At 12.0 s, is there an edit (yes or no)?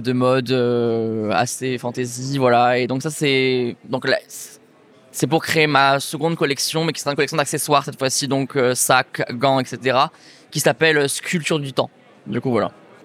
no